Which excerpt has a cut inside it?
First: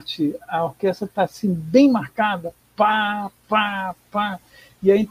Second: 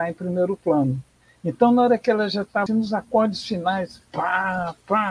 second; 2 cuts; at 2.7 s, 4.1 s

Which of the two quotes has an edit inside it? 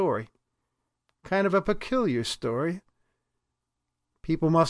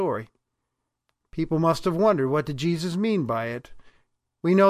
second; 1 cut; at 1.2 s

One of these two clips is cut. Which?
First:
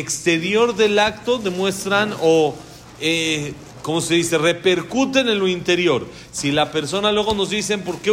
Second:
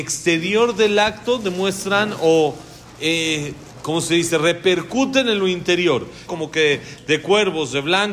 second; 1 cut; at 6.3 s

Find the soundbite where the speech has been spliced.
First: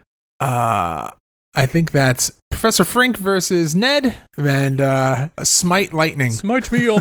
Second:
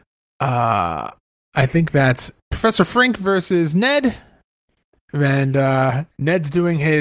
first; 2 cuts; at 4.3 s, 5.4 s

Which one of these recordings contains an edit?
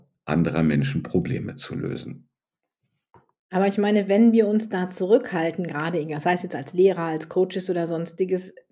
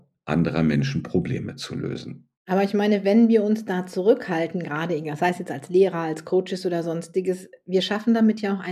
second; 1 cut; at 2.3 s

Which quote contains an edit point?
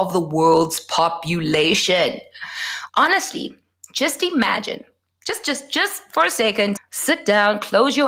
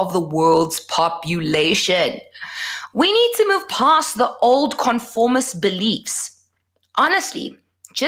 first; 2 cuts; at 2.9 s, 6.8 s

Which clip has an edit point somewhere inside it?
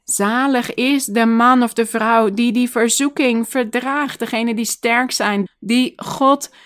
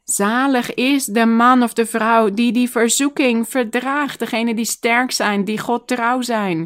first; 1 cut; at 5.5 s

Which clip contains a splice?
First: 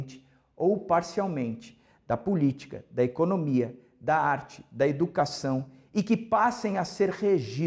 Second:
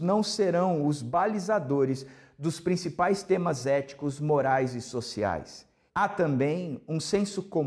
second; 1 cut; at 5.9 s

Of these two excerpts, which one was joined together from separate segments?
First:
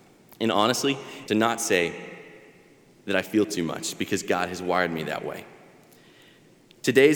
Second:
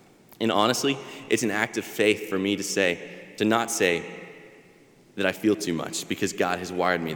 first; 1 cut; at 1.2 s

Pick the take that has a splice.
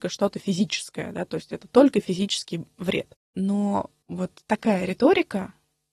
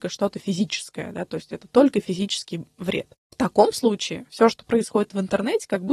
first; 2 cuts; at 3.2 s, 4.4 s

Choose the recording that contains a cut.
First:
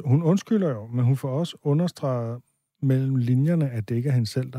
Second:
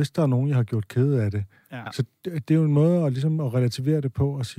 second; 1 cut; at 1.9 s

